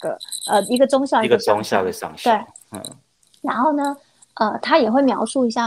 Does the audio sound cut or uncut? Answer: uncut